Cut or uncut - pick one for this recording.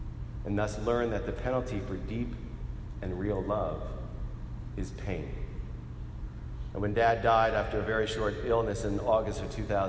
cut